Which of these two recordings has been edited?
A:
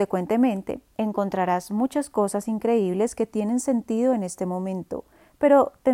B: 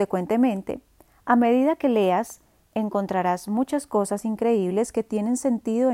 A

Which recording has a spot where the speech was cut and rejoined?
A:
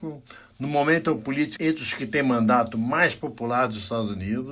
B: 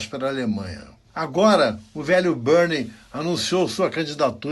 A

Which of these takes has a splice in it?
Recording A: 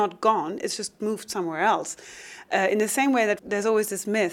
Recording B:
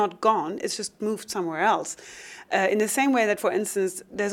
A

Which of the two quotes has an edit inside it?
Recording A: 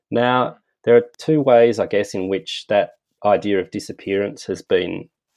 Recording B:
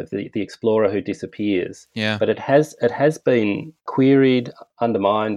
B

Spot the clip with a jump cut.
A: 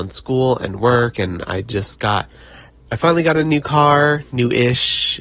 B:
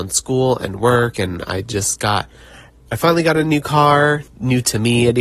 B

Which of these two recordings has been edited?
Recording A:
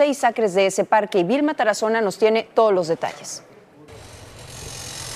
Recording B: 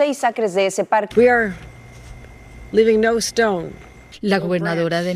B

